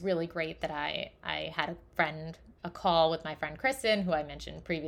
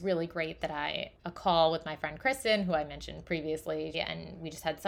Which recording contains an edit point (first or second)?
second